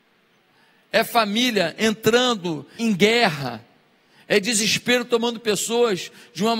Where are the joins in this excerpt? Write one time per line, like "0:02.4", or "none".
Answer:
0:02.8